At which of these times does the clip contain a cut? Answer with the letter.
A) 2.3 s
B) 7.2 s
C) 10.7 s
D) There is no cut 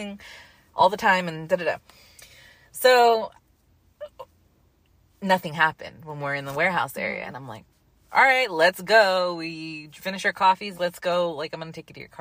C